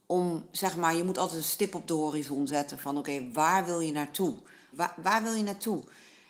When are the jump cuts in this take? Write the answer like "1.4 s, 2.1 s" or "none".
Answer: 4.7 s